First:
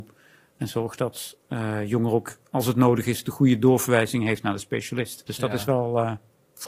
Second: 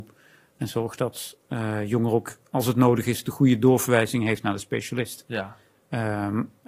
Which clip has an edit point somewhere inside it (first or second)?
first